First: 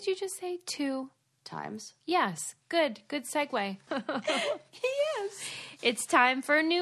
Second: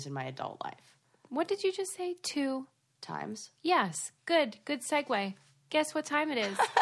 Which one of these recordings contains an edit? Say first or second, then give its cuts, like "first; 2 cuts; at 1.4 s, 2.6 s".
first; 1 cut; at 3.9 s